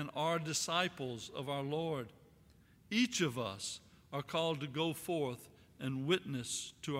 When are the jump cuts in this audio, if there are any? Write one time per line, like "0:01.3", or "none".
none